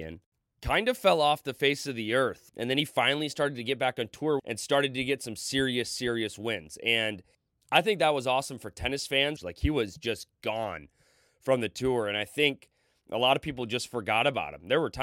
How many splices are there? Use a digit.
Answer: 3